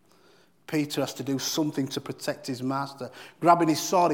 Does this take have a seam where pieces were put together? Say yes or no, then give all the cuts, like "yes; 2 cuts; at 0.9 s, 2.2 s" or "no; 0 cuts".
no; 0 cuts